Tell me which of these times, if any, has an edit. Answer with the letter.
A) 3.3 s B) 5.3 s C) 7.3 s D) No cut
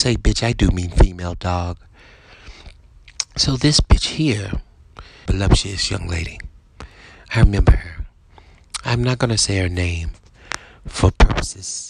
B